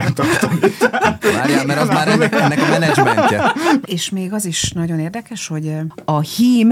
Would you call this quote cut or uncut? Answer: cut